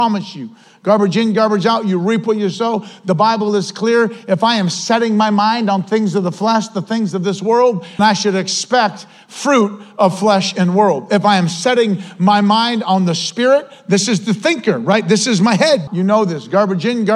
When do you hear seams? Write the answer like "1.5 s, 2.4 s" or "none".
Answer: 8.0 s, 15.9 s